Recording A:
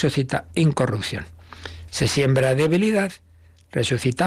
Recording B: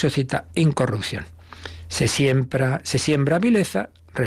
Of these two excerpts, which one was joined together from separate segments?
A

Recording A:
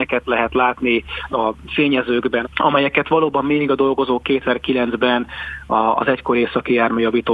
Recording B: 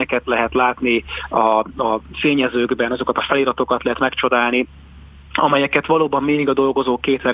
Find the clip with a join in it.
A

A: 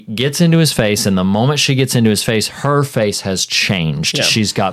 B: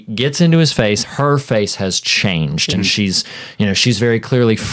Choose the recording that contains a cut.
B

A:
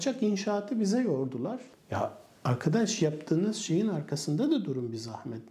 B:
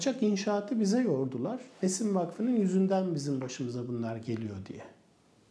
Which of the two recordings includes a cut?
A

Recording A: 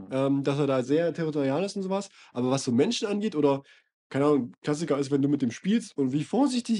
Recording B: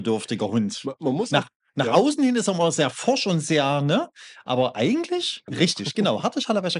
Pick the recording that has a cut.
B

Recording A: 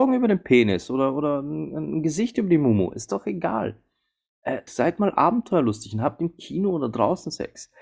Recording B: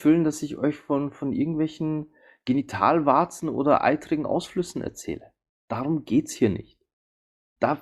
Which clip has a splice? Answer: A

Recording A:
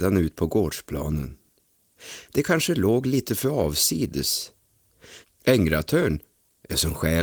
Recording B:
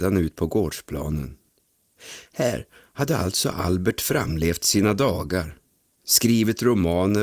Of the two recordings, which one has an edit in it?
A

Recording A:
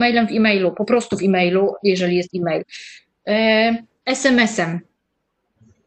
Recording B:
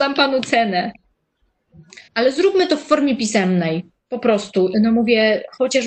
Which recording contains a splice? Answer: B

